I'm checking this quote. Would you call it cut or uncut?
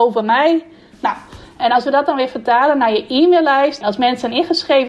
cut